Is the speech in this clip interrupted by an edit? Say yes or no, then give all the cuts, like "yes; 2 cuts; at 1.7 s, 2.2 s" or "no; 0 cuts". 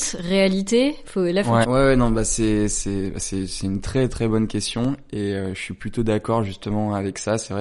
yes; 1 cut; at 1.6 s